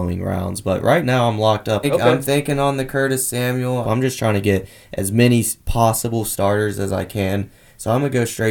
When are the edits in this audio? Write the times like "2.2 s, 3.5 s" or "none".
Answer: 1.8 s, 3.8 s